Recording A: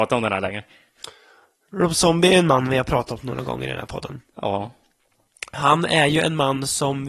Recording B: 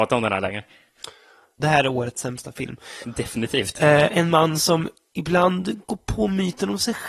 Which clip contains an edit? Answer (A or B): B